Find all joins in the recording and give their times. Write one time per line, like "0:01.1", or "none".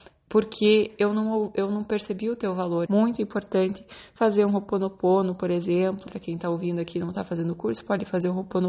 0:02.9
0:06.1